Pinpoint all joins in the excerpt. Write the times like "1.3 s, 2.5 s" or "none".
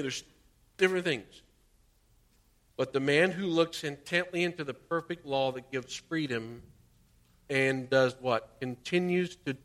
2.7 s